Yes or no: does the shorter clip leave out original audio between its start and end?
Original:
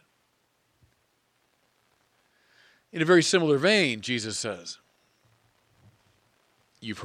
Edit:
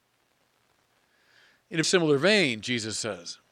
yes